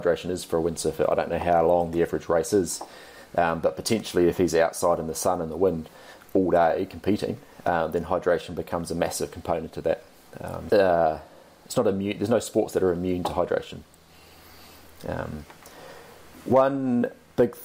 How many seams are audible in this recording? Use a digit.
1